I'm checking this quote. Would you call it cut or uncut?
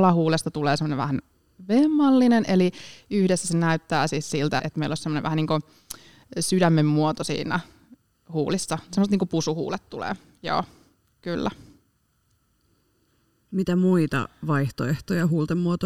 cut